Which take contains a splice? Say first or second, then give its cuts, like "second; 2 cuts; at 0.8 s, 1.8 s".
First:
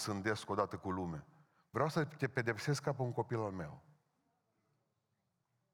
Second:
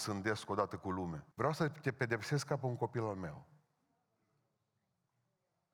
second; 1 cut; at 1.3 s